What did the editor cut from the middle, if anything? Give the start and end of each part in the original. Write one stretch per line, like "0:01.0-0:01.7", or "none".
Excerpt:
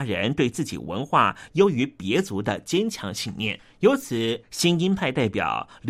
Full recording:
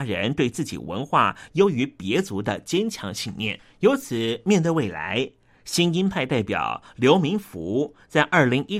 0:04.4-0:05.6